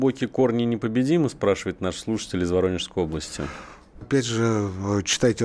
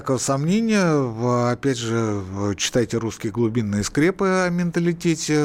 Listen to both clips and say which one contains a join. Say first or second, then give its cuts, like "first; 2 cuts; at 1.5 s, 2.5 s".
first; 1 cut; at 4.0 s